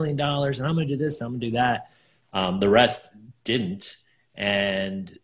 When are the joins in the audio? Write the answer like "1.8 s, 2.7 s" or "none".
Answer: 2.2 s